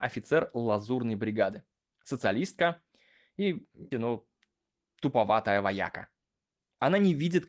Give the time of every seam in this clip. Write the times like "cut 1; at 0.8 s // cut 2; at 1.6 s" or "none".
cut 1; at 1.9 s // cut 2; at 3.9 s